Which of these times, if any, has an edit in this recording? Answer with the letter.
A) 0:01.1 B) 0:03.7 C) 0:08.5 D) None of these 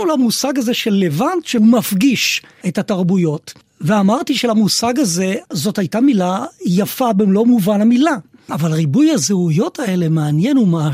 C